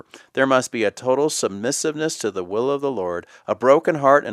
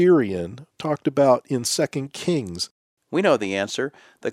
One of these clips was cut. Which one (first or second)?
second